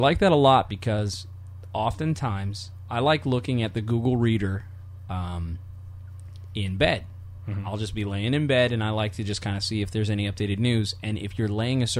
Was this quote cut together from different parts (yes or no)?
no